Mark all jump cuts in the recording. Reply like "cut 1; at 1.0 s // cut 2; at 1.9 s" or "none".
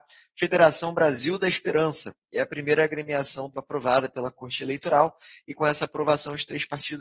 cut 1; at 3.5 s